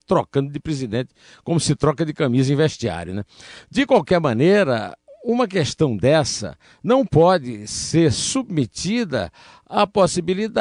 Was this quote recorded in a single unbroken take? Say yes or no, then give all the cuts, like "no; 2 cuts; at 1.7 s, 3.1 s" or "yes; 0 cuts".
yes; 0 cuts